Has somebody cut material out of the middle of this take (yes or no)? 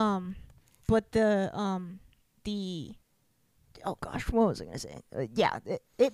no